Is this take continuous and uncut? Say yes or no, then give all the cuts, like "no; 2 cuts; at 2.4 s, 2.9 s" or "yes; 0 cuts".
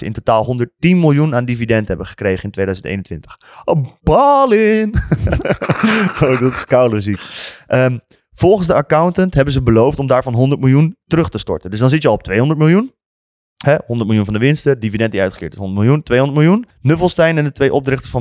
no; 1 cut; at 16.7 s